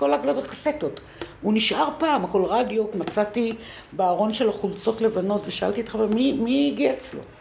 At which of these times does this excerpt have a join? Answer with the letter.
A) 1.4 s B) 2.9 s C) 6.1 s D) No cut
B